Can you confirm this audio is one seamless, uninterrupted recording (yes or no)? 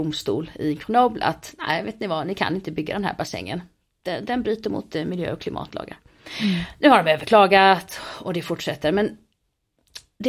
yes